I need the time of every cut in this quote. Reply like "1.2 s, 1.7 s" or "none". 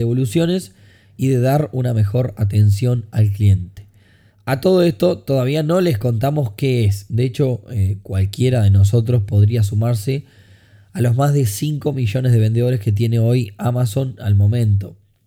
4.3 s, 7.1 s